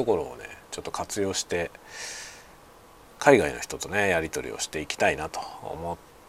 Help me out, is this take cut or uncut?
uncut